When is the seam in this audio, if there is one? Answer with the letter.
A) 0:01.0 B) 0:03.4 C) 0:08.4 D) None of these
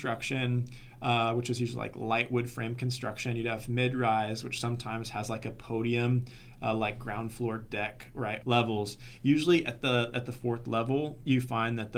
C